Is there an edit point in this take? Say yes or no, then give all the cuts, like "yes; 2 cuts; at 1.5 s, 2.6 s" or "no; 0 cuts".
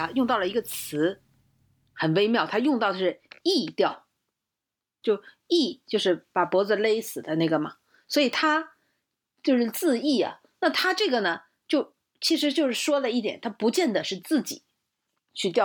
yes; 1 cut; at 5.0 s